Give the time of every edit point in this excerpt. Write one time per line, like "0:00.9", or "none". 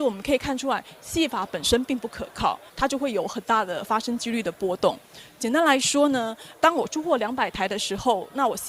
0:02.7